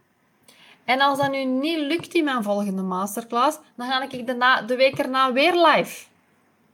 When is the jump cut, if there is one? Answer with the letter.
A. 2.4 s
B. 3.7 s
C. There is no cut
C